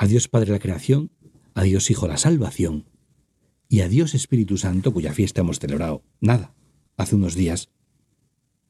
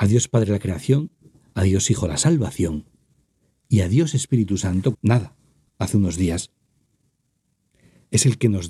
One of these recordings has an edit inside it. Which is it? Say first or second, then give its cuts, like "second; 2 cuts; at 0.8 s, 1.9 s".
second; 1 cut; at 4.9 s